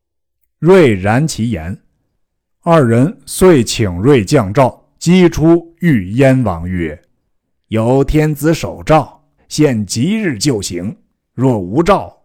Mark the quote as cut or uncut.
cut